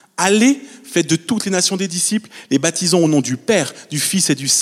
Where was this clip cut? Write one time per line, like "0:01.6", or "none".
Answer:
none